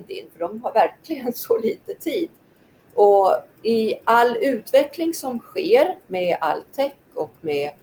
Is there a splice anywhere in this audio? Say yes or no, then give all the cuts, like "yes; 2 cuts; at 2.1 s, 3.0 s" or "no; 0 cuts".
yes; 1 cut; at 2.8 s